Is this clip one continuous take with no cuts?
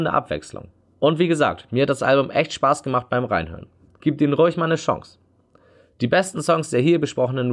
yes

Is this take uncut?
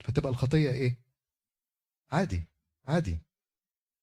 yes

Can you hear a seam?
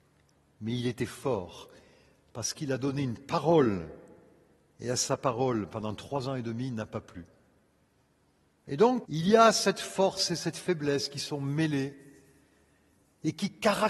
yes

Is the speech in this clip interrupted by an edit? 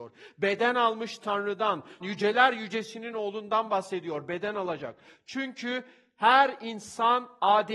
yes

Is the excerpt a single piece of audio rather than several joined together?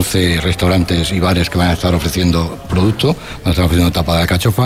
yes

